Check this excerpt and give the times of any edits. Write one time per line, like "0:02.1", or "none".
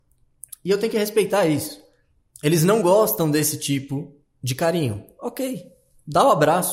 none